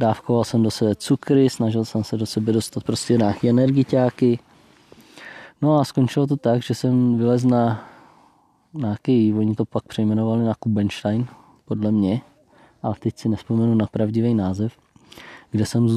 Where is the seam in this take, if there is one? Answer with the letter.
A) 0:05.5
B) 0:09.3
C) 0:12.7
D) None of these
D